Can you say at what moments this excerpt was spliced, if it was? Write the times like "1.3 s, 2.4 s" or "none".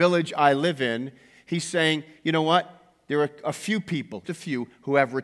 4.2 s